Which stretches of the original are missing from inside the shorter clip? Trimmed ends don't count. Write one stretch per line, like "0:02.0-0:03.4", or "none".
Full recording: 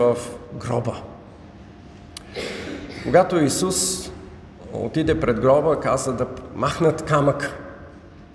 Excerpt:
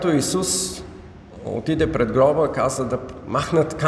none